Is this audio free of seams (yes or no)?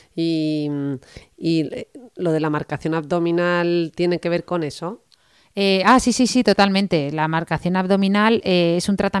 yes